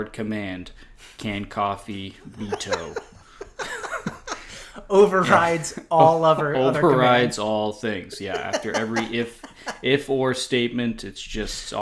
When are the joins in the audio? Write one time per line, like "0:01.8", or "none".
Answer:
none